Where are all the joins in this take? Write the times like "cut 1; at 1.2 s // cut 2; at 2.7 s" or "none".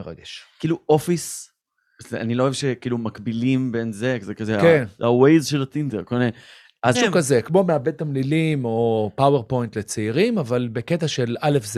cut 1; at 6.9 s